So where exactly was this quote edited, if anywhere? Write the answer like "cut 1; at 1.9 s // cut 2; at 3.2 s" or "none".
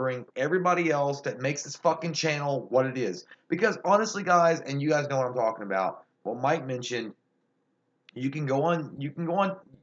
none